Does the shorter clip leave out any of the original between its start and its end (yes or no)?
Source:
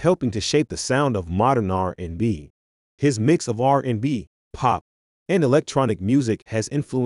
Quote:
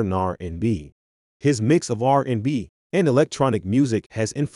yes